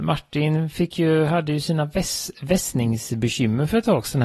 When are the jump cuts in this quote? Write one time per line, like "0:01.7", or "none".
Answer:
none